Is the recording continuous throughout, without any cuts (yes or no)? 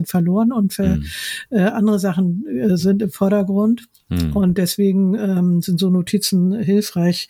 yes